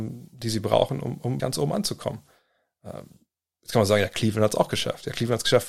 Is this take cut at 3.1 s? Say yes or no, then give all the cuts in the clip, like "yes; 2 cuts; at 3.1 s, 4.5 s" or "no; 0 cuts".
no; 1 cut; at 1.4 s